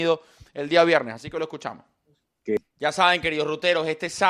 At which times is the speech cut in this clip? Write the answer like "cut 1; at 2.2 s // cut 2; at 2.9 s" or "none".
none